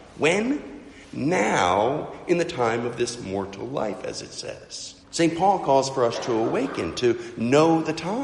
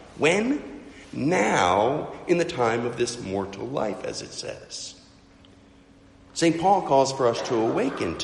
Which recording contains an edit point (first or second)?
first